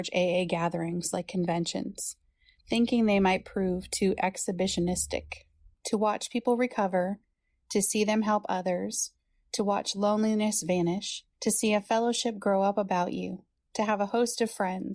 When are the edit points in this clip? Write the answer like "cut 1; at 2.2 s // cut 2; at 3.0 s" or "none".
cut 1; at 5.7 s // cut 2; at 11.3 s